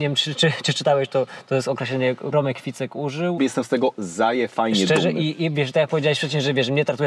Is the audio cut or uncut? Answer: cut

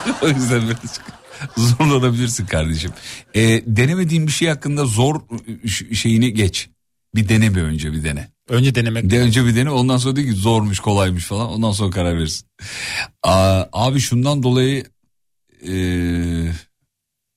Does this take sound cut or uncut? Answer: uncut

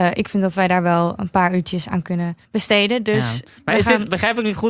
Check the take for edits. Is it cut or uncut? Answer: cut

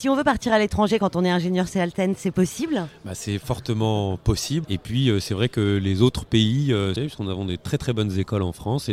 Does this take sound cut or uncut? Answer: cut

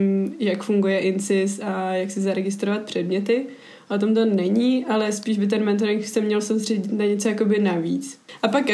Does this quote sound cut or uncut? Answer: uncut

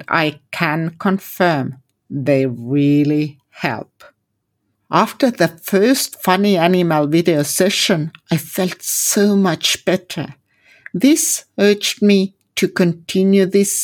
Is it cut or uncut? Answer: uncut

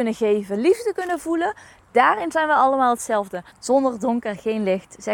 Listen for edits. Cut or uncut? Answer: cut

